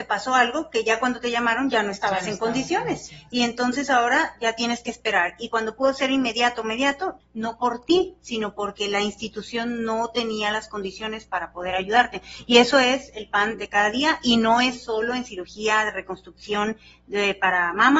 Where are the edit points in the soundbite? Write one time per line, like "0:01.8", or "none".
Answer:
0:07.2